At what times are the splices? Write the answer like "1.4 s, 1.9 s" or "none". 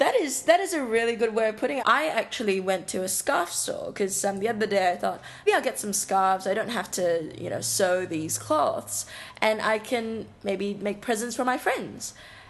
1.8 s, 5.5 s